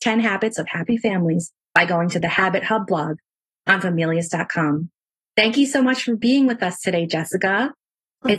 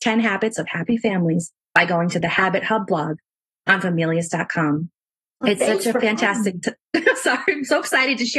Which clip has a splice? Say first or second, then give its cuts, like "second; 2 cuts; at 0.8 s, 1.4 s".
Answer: second; 1 cut; at 5.2 s